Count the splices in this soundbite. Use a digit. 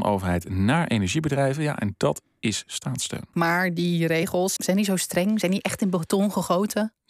2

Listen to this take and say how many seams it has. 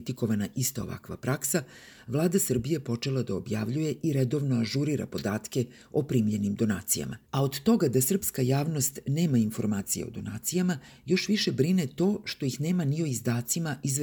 1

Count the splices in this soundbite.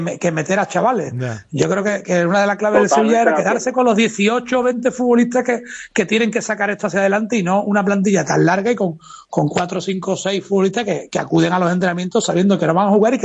0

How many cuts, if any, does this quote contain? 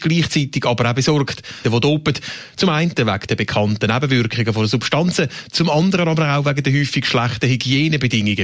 1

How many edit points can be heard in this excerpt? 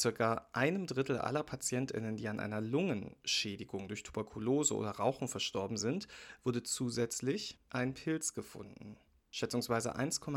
0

